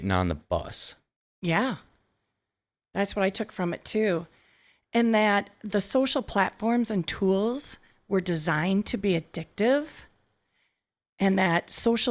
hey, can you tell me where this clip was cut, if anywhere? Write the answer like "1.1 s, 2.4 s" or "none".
1.2 s

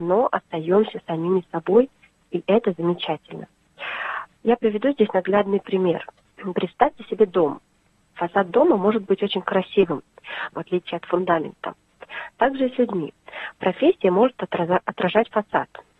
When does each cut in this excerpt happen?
4.3 s, 10.5 s

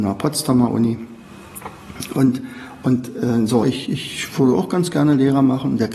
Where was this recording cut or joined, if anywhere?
3.6 s

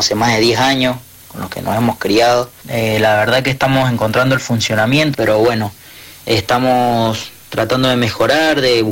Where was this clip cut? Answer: 2.6 s, 5.1 s

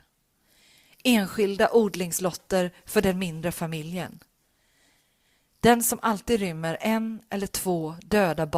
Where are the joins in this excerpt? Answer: none

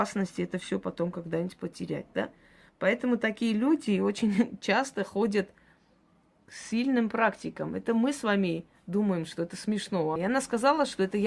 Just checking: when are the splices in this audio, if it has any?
10.2 s

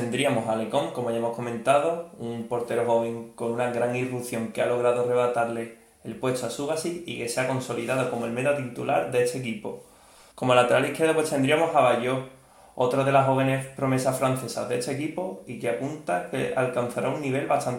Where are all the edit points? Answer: 10.3 s

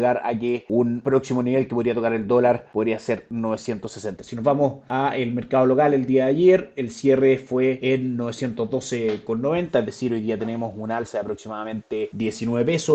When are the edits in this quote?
4.2 s

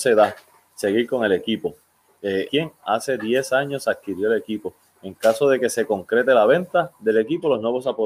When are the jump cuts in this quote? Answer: 2.5 s

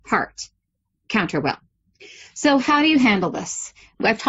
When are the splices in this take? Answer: none

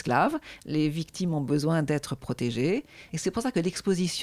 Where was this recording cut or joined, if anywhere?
3.1 s

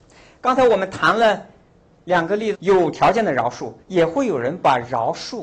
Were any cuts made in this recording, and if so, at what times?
2.5 s, 3.8 s

